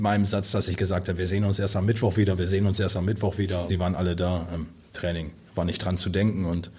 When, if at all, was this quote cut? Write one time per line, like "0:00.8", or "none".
0:03.7